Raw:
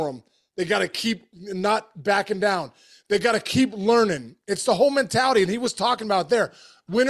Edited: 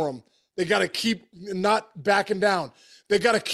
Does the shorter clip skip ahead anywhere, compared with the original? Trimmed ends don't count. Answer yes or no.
no